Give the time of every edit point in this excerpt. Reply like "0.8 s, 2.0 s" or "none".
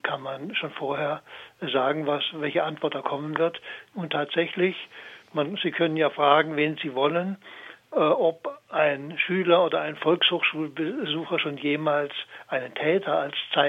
3.9 s